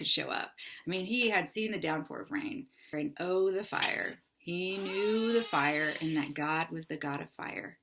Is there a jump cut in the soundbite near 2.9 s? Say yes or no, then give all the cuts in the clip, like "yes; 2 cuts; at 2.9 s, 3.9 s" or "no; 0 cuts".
yes; 1 cut; at 2.9 s